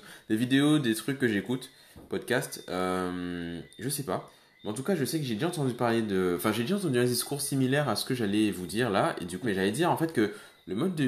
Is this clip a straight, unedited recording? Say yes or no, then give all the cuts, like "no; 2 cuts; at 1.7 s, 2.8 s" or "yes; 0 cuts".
no; 1 cut; at 9.4 s